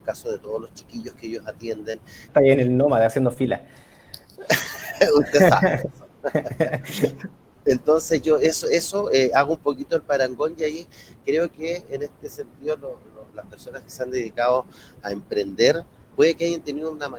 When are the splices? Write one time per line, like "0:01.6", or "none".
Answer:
0:02.3